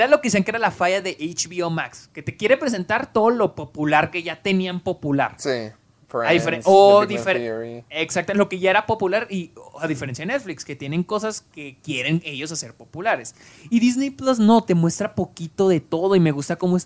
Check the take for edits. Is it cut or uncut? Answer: uncut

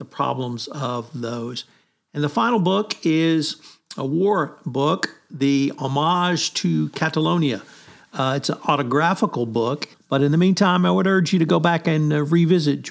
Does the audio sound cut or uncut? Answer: cut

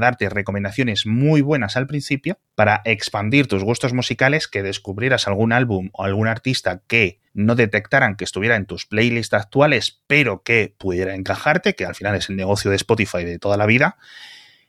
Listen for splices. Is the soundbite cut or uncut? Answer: cut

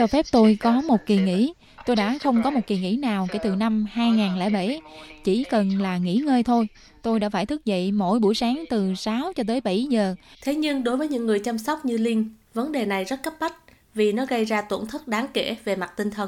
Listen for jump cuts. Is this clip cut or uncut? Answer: cut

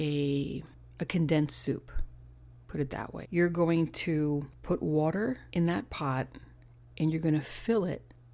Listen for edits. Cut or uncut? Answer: cut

